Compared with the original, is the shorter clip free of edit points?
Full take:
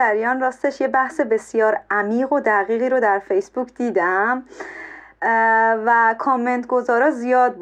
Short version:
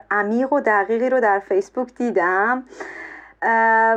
yes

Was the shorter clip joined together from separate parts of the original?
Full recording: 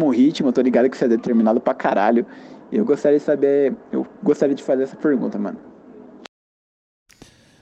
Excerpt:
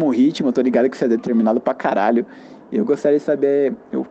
no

